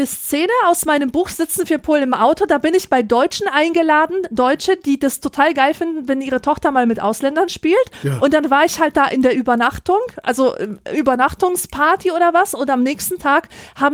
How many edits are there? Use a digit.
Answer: 0